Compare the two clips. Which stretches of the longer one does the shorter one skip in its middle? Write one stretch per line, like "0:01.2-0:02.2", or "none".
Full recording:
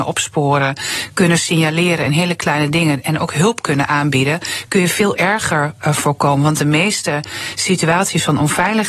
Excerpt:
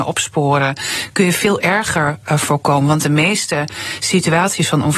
0:01.1-0:04.7